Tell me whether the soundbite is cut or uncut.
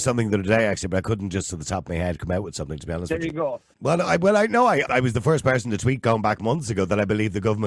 cut